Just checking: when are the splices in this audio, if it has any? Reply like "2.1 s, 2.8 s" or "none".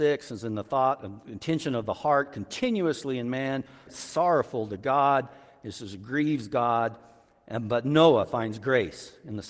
3.9 s